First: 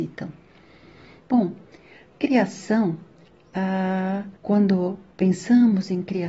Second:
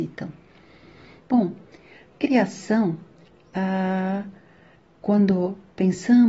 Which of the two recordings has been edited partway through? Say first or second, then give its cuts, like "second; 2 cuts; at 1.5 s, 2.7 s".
first; 1 cut; at 4.4 s